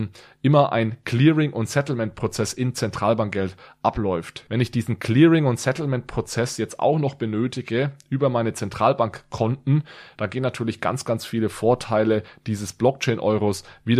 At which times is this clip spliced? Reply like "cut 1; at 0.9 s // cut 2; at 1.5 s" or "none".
cut 1; at 4.5 s // cut 2; at 10.1 s

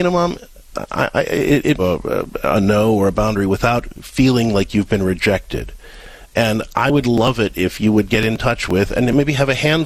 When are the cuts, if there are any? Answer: cut 1; at 1.8 s

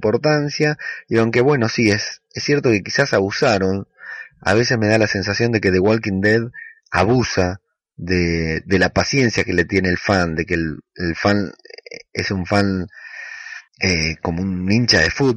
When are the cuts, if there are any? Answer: cut 1; at 13.7 s

